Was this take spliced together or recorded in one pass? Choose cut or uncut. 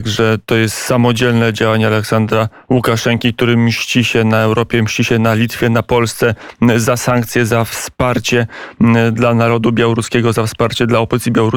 uncut